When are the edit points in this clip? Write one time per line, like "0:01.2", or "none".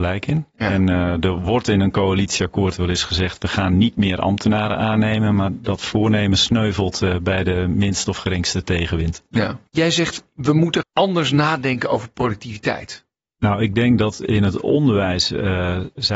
0:13.3